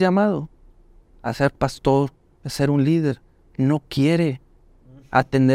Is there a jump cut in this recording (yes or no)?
no